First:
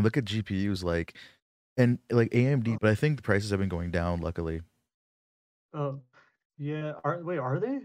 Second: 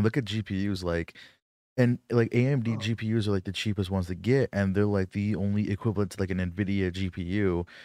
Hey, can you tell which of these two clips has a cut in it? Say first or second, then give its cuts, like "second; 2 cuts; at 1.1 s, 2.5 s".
first; 1 cut; at 2.8 s